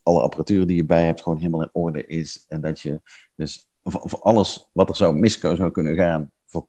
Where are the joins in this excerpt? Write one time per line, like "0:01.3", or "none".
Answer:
0:03.8